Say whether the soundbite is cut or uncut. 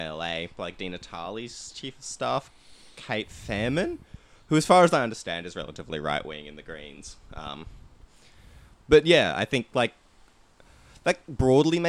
uncut